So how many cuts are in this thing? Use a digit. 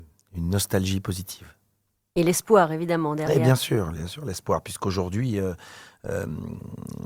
0